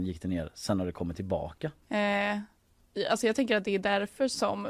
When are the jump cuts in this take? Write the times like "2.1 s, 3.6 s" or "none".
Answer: 1.8 s